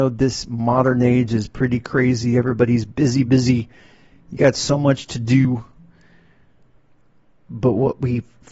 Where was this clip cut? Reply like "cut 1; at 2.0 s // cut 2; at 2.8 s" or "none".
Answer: cut 1; at 3.2 s